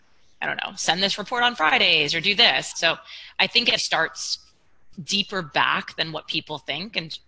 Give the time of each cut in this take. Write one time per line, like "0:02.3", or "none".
0:02.7
0:03.8